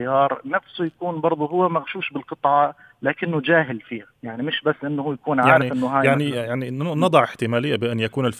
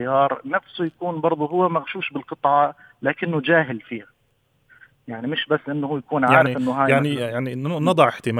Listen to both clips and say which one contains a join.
first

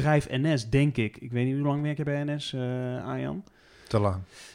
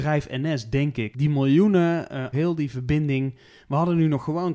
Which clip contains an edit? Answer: second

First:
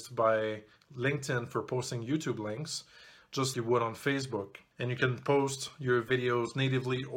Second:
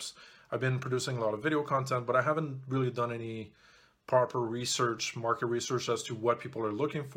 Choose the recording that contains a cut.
first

